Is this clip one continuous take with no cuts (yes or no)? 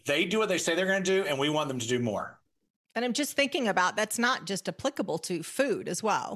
yes